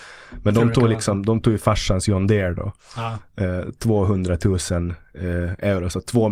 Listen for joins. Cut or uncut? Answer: uncut